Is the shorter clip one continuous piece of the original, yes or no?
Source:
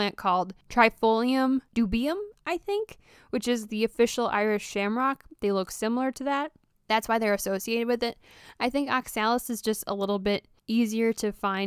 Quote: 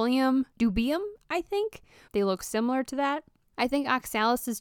no